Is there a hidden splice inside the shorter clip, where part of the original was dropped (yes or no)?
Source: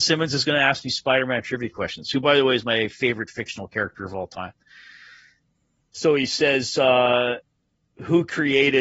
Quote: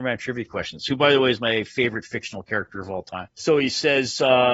yes